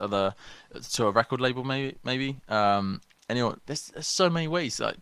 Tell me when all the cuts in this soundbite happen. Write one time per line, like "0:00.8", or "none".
0:03.6